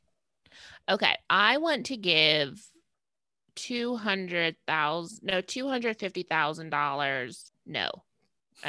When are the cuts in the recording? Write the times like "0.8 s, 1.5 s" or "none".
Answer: none

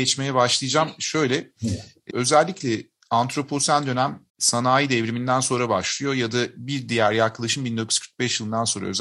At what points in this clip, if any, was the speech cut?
2.1 s, 4.3 s

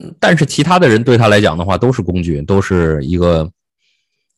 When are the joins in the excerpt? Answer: none

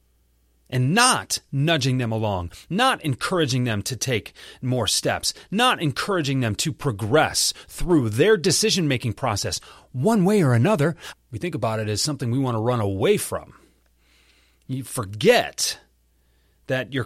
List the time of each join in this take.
11.1 s

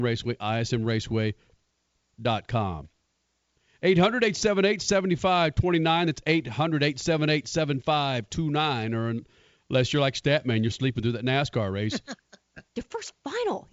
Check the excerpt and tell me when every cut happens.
10.7 s, 12.7 s

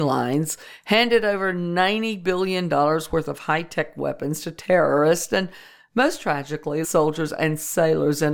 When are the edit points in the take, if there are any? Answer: 6.8 s

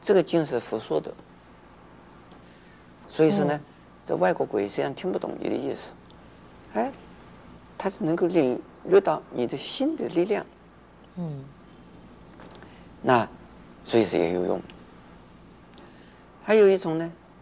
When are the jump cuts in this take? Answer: 3.0 s

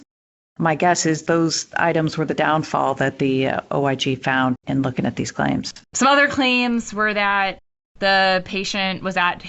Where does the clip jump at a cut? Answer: 4.6 s, 5.8 s

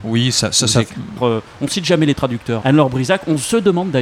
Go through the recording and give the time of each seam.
1.2 s, 2.6 s

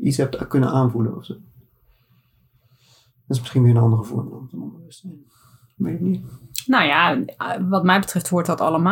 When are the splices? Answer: none

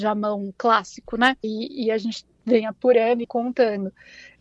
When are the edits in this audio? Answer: 1.4 s, 3.2 s

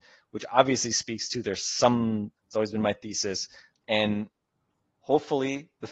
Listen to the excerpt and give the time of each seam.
2.4 s, 3.7 s

